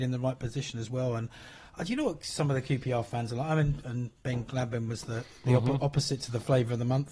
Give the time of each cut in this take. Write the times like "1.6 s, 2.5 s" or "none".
3.8 s